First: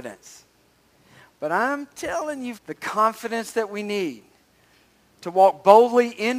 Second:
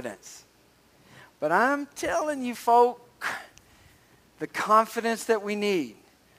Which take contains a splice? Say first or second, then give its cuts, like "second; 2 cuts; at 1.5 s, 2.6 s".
first; 1 cut; at 2.5 s